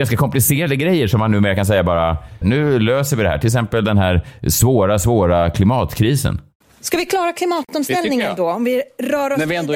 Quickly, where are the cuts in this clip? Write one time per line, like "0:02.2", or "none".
0:02.4